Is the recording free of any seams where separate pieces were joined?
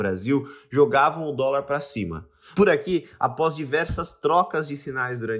no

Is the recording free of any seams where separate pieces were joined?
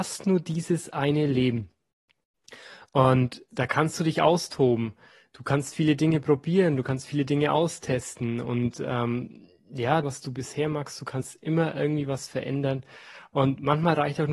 no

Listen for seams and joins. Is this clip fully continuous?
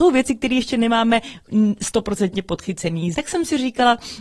no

